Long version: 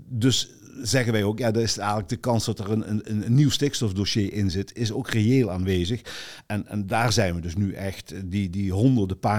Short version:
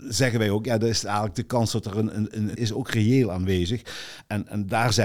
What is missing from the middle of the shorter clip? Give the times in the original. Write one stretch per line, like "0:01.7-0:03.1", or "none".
0:03.3-0:04.7